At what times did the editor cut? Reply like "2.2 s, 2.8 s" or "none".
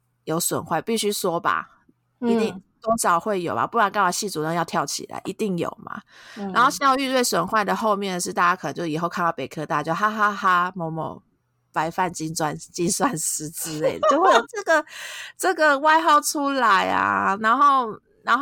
14.4 s